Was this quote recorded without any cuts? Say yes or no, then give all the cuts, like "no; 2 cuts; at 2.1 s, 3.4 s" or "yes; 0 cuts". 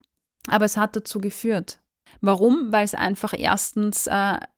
no; 1 cut; at 2.1 s